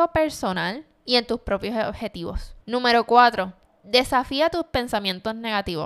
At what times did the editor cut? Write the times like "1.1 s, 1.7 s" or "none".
2.6 s